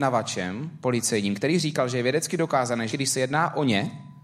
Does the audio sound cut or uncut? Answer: cut